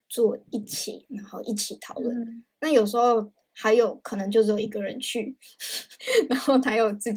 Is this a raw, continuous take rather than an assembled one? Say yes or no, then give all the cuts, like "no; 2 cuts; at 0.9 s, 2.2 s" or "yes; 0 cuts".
yes; 0 cuts